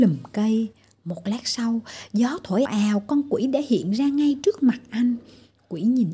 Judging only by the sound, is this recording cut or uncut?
cut